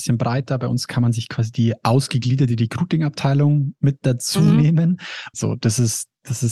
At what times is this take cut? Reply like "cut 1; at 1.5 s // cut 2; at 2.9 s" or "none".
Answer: cut 1; at 5.3 s